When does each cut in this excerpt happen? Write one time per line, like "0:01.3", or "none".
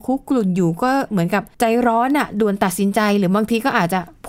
0:01.5